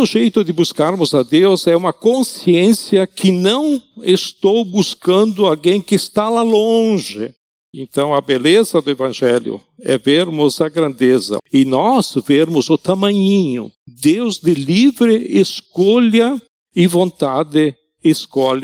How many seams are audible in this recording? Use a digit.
2